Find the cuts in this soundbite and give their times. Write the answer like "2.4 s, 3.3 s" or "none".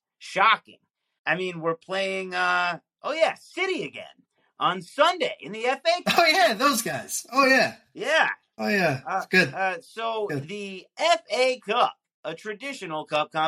1.2 s